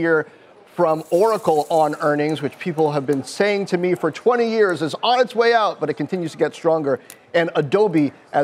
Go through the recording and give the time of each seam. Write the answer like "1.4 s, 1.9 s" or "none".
none